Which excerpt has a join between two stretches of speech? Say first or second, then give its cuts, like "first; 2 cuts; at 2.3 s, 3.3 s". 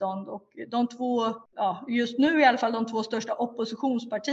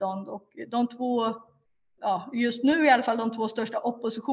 first; 1 cut; at 1.5 s